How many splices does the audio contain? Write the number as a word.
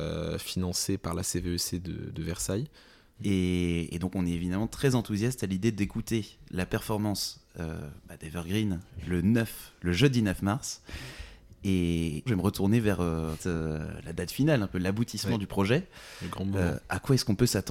three